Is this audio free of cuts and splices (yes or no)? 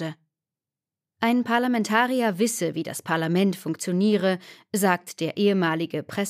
yes